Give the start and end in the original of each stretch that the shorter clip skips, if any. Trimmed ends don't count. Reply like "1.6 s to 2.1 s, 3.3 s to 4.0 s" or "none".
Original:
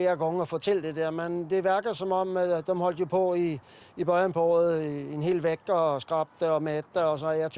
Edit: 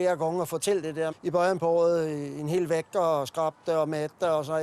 1.1 s to 3.8 s

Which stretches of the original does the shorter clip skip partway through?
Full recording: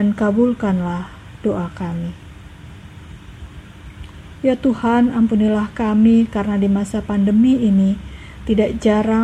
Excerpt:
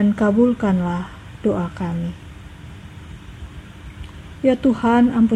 none

